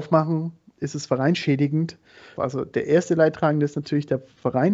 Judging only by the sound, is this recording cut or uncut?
cut